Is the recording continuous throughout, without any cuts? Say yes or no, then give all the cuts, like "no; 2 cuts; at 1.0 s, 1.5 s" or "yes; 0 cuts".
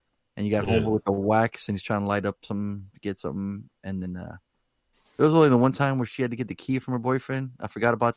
yes; 0 cuts